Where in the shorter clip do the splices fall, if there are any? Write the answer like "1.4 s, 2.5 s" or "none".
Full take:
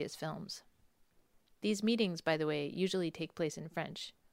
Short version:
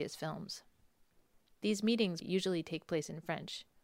2.2 s